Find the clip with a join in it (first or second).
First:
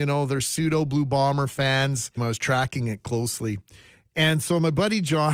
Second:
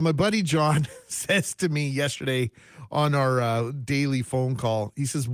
first